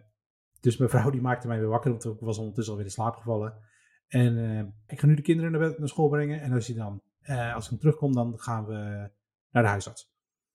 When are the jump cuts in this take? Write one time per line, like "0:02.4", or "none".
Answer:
0:04.9